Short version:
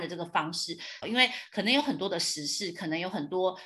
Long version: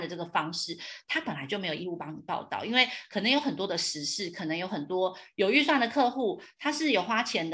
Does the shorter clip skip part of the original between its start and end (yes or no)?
yes